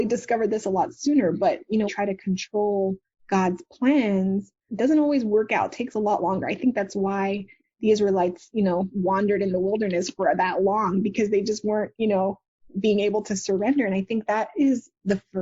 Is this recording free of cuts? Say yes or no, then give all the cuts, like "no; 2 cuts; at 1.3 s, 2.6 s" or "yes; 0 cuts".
no; 2 cuts; at 1.9 s, 4.7 s